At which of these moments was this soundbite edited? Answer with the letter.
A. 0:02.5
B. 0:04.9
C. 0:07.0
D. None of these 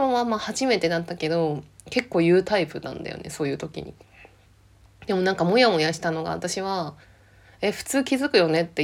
C